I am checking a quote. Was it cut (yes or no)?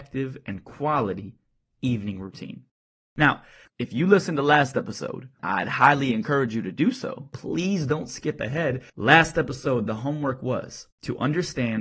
yes